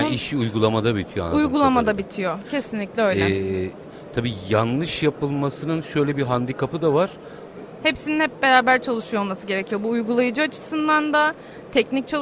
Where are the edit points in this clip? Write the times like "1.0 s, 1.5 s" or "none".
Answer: 7.8 s